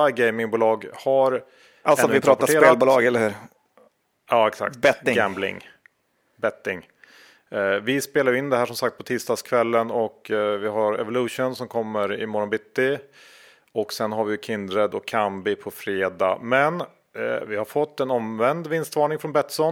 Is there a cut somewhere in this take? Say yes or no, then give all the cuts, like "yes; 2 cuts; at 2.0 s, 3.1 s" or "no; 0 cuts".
no; 0 cuts